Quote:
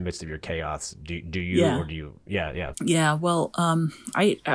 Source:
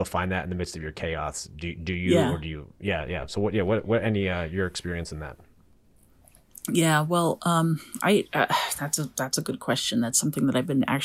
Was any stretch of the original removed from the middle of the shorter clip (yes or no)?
yes